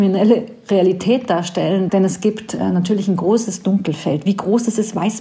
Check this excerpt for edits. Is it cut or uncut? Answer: cut